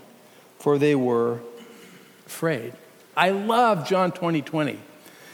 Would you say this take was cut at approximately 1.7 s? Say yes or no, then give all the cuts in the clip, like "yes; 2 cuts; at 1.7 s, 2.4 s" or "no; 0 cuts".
no; 1 cut; at 3.1 s